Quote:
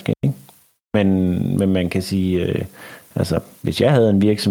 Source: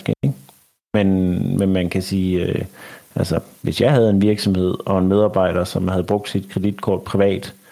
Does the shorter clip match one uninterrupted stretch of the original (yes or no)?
yes